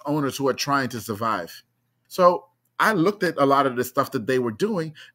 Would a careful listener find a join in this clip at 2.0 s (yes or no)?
yes